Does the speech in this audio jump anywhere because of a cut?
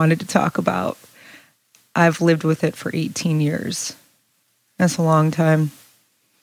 no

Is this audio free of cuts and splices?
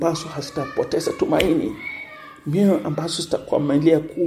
yes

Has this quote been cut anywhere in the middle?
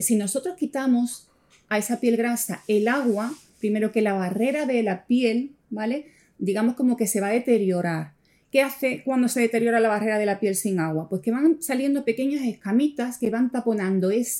no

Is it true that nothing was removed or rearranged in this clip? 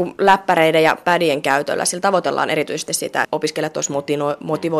no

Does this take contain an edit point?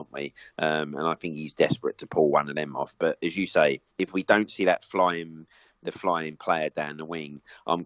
yes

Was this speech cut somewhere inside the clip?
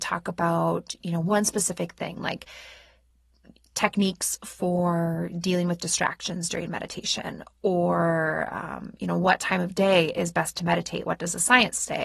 yes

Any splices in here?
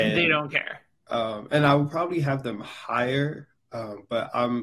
yes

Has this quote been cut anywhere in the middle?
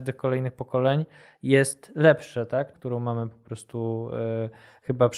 yes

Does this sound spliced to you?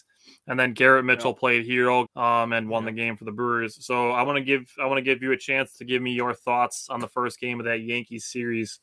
yes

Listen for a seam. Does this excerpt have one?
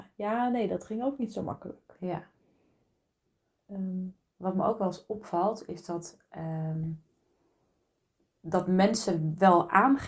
no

